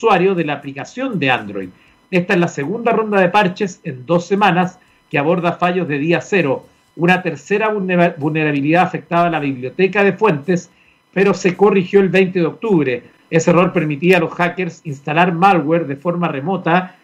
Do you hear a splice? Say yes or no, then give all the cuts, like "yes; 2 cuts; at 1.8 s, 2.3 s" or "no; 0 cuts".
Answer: no; 0 cuts